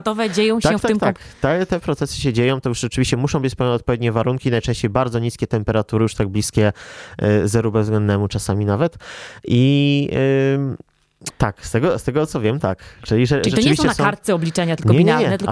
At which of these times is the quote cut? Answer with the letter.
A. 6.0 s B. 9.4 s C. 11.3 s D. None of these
C